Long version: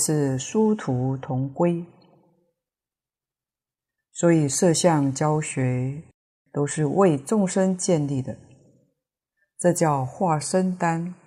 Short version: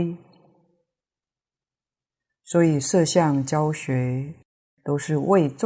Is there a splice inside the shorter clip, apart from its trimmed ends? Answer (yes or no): no